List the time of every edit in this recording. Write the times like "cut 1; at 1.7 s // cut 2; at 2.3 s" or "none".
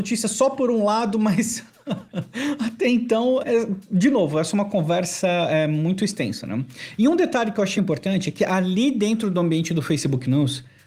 cut 1; at 3.4 s // cut 2; at 7.8 s